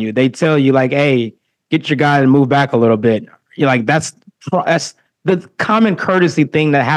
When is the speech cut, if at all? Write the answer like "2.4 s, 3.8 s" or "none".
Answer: none